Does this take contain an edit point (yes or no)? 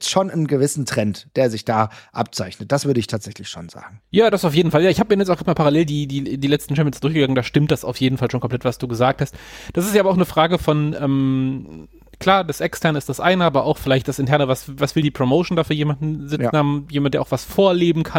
no